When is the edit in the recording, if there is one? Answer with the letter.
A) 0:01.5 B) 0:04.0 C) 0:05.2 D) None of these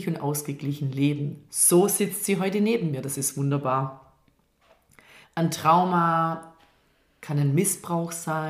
C